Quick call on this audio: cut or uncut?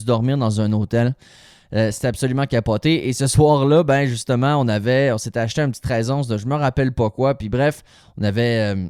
uncut